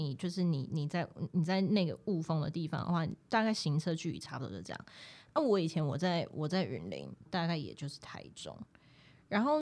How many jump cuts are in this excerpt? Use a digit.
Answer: 1